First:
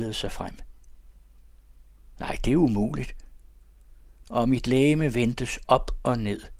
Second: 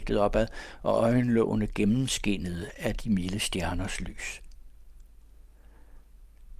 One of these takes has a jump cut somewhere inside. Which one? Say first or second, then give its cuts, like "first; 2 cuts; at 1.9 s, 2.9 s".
first; 2 cuts; at 2.1 s, 4.2 s